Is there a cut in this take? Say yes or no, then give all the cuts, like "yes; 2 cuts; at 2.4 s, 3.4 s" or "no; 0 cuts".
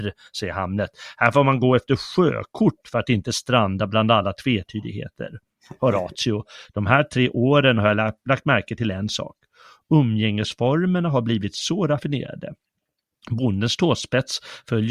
no; 0 cuts